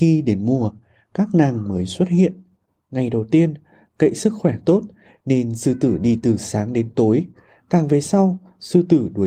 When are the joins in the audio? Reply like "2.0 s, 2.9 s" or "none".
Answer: 2.8 s